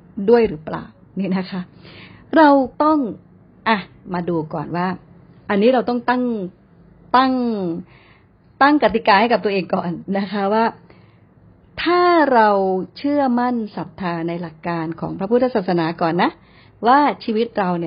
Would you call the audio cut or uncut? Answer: cut